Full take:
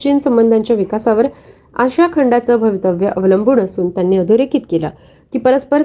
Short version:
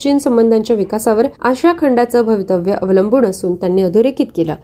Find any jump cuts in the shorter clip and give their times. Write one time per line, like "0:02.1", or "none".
0:01.4